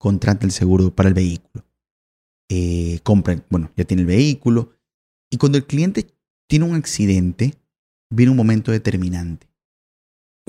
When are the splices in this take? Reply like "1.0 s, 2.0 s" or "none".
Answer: none